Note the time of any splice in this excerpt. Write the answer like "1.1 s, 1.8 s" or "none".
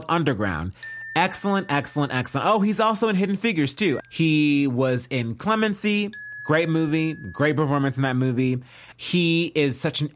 4.0 s, 8.9 s